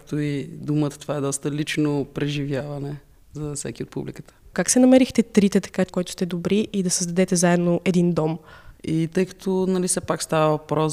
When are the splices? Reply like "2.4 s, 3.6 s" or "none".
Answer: 4.5 s, 5.9 s, 8.8 s